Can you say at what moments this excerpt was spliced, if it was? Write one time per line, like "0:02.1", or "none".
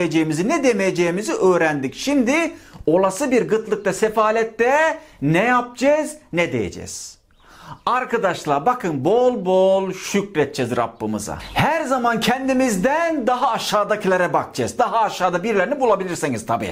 none